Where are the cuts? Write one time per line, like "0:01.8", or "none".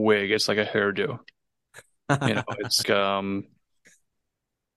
0:02.8